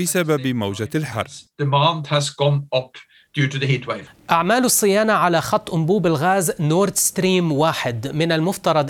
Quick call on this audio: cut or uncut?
uncut